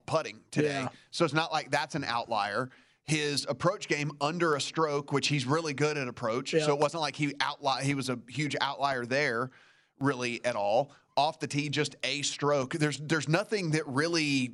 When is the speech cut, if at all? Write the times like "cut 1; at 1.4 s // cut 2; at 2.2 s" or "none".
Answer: none